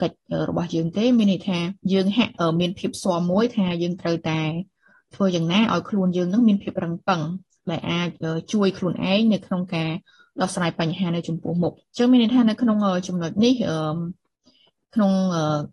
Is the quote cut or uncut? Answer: cut